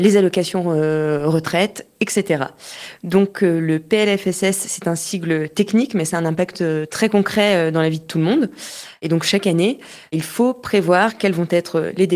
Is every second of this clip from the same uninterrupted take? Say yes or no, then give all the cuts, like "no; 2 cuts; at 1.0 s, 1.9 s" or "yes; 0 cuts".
yes; 0 cuts